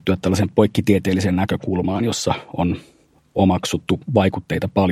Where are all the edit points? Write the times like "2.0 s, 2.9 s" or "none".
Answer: none